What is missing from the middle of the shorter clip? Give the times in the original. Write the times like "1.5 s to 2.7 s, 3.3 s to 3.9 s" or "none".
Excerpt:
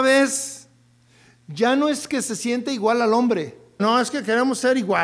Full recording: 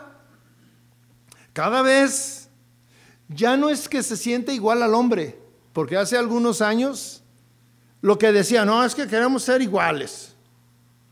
5.6 s to 8.6 s